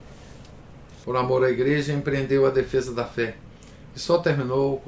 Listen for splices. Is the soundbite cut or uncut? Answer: cut